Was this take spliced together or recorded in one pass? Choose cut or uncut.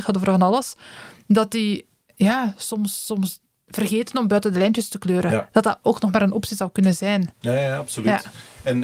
uncut